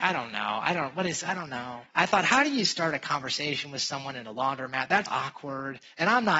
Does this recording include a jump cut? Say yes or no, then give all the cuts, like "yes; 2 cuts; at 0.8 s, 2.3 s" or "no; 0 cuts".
yes; 2 cuts; at 1.9 s, 5.1 s